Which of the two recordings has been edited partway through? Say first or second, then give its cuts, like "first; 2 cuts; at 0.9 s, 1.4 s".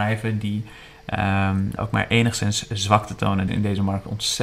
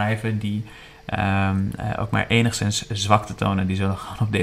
first; 2 cuts; at 1.8 s, 3.5 s